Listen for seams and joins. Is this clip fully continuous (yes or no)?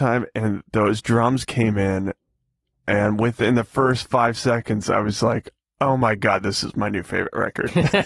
yes